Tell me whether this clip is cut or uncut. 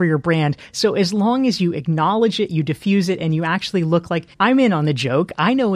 cut